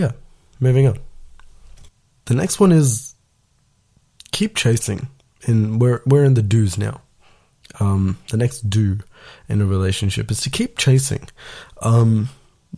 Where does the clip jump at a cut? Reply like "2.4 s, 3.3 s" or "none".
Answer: none